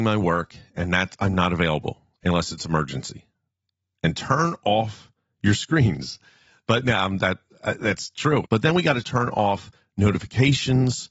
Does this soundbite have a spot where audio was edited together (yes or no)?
yes